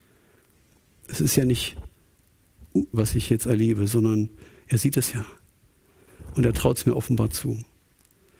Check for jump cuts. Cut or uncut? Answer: cut